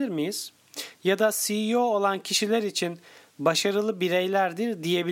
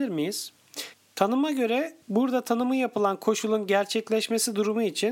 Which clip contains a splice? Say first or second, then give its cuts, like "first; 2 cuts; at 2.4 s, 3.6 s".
second; 2 cuts; at 0.9 s, 2.0 s